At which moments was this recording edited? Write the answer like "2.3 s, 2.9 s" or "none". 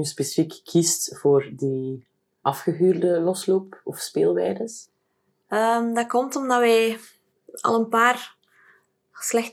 2.4 s